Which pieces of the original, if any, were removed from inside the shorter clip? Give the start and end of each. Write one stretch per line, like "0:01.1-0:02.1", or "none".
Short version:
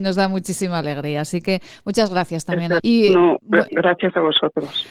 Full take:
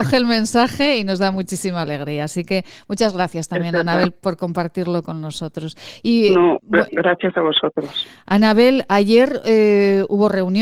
0:03.8-0:06.0

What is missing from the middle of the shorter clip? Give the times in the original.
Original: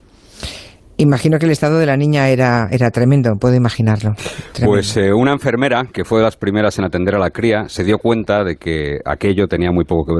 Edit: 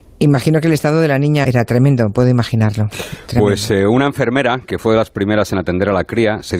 0:02.2-0:02.7

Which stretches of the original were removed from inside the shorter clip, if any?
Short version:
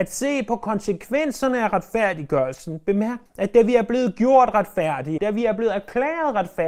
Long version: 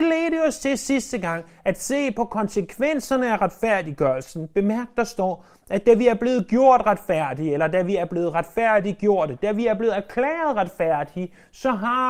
0:04.9-0:05.6
0:07.5-0:09.4

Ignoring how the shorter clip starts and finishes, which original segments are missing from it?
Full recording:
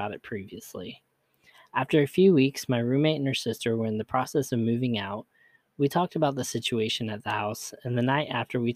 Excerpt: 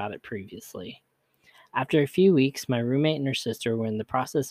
none

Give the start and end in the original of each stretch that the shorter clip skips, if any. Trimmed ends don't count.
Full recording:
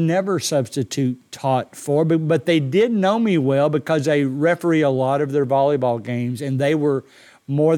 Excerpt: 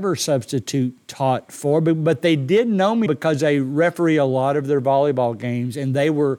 0:03.3-0:03.7

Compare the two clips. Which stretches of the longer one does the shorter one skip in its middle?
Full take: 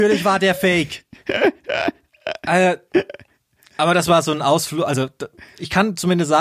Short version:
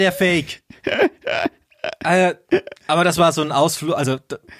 0:03.2-0:03.7

